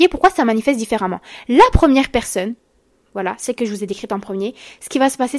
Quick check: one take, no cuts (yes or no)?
yes